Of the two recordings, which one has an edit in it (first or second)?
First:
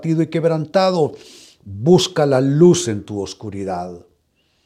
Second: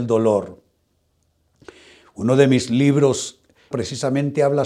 second